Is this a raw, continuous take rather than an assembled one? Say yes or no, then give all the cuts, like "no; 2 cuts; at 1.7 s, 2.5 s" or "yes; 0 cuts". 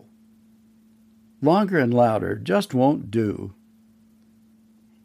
yes; 0 cuts